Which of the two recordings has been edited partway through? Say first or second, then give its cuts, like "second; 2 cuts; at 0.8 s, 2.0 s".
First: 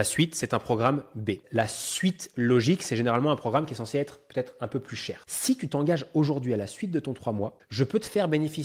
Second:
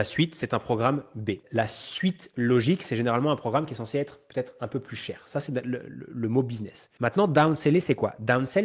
first; 1 cut; at 5.2 s